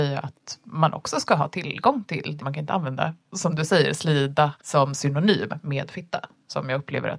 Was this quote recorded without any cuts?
no; 2 cuts; at 2.4 s, 4.6 s

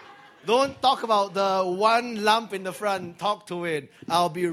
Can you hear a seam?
no; 0 cuts

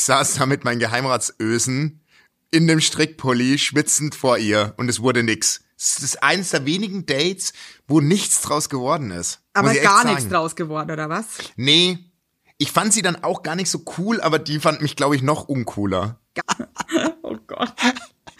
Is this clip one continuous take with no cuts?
no; 1 cut; at 16.4 s

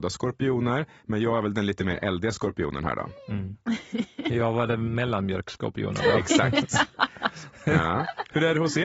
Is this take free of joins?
yes; 0 cuts

